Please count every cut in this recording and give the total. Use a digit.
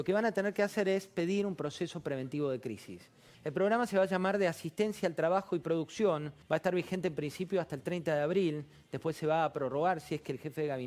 2